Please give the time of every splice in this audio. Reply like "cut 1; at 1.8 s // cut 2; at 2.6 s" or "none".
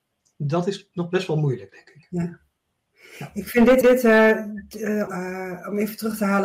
cut 1; at 3.8 s // cut 2; at 5.1 s